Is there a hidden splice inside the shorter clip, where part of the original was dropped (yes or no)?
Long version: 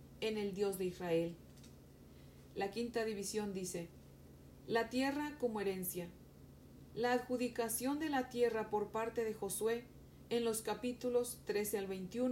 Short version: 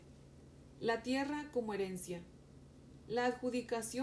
no